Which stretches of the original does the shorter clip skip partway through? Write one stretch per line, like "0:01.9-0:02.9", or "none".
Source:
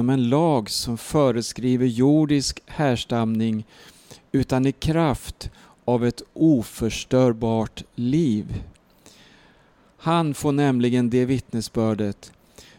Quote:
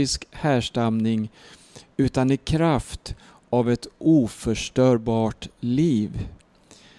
none